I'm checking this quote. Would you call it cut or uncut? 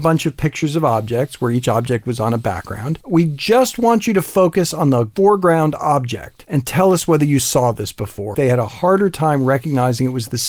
cut